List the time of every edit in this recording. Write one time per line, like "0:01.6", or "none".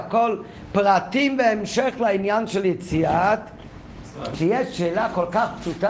0:04.3